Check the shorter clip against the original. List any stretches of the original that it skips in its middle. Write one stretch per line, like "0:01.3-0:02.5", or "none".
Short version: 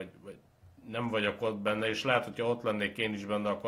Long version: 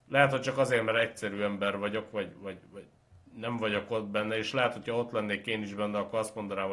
none